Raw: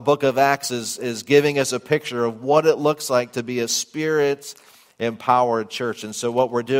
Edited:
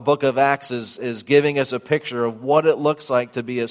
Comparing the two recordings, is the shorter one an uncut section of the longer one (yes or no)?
yes